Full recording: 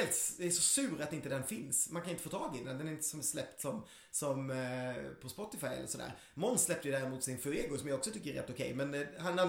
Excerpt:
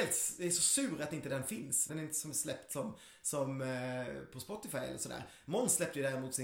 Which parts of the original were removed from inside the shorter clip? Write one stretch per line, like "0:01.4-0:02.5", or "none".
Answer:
0:01.9-0:02.8